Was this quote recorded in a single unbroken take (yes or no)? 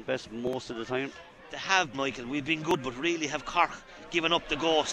no